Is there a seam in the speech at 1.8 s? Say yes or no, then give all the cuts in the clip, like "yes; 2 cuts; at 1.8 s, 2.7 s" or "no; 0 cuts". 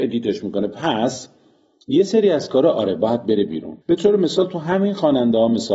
no; 1 cut; at 3.8 s